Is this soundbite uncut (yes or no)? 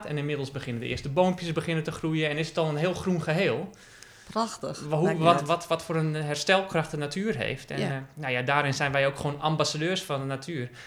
yes